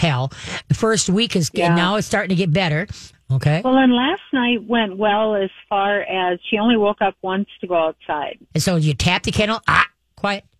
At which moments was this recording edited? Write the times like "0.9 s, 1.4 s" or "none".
3.1 s, 8.5 s